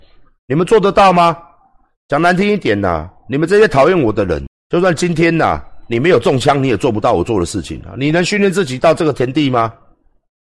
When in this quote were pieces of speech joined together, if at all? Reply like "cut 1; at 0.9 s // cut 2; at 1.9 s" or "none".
cut 1; at 4.5 s